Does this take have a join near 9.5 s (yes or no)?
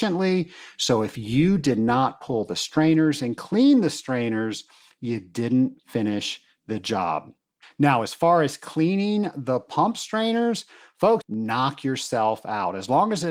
no